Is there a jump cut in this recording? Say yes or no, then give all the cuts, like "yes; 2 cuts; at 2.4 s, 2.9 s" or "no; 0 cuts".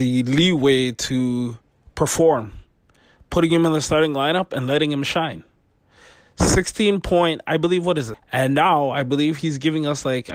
yes; 1 cut; at 8.1 s